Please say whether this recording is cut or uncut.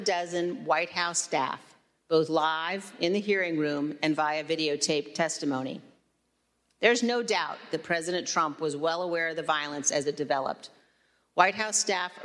uncut